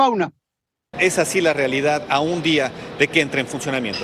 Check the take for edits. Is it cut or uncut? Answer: cut